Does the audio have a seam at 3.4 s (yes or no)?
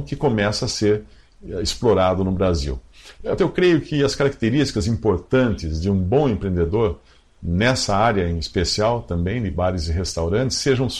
yes